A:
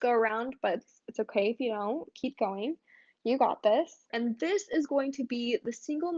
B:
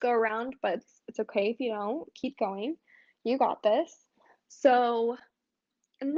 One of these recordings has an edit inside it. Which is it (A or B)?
A